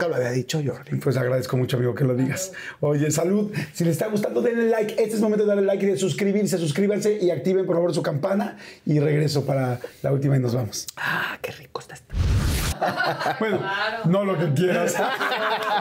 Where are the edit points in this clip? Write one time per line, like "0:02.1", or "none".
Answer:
0:12.7